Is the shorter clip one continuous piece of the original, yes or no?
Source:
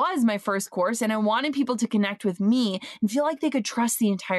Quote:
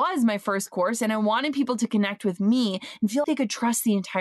no